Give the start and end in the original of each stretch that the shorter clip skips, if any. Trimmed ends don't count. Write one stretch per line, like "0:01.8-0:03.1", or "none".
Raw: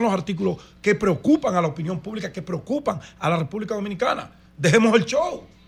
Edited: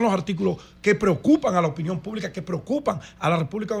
none